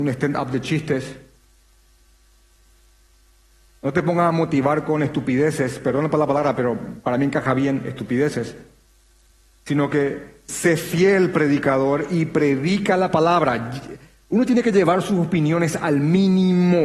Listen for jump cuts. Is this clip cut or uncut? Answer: uncut